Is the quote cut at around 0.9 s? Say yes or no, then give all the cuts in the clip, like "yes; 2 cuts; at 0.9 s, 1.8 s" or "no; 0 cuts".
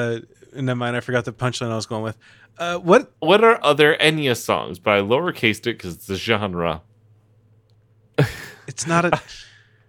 no; 2 cuts; at 3.1 s, 8.2 s